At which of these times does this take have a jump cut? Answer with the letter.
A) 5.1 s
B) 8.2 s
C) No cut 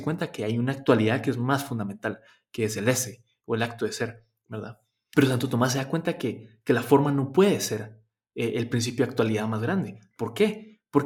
A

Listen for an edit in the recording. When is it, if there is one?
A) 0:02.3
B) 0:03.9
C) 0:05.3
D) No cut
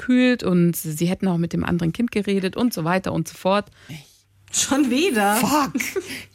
B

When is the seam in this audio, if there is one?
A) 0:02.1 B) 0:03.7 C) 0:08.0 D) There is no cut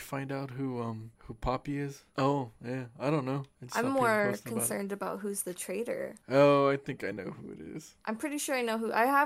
A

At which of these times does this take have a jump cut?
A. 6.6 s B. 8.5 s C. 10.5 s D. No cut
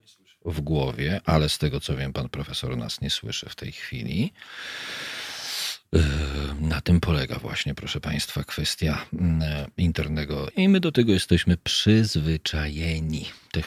C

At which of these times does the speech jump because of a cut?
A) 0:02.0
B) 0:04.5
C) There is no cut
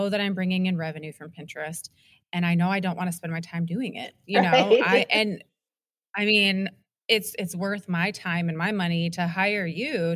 C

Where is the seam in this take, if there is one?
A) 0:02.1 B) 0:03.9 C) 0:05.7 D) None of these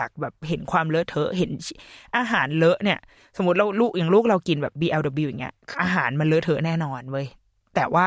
C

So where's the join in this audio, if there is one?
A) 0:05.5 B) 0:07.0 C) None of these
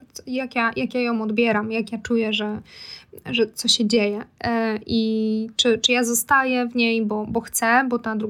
C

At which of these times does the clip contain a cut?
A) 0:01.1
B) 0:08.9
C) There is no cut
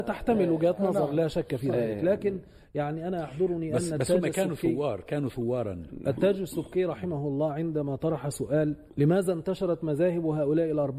B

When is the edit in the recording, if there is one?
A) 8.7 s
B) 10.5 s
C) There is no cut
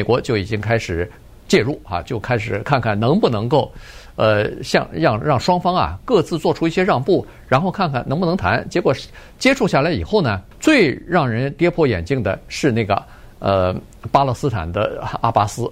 B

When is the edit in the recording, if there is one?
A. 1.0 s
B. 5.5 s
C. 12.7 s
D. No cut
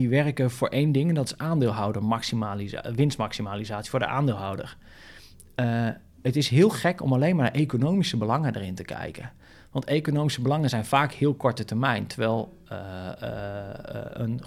D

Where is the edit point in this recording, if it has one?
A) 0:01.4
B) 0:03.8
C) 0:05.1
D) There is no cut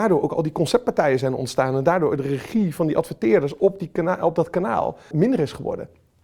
C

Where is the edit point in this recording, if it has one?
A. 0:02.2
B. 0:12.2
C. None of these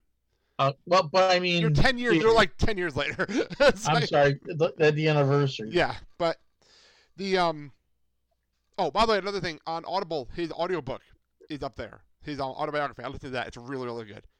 A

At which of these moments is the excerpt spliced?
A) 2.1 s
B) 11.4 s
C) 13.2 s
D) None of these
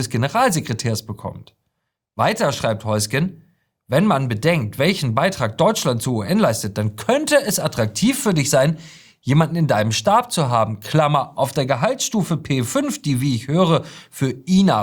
B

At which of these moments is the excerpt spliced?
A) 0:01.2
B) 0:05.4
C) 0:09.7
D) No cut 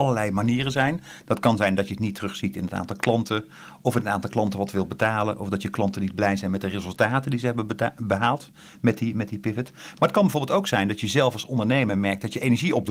D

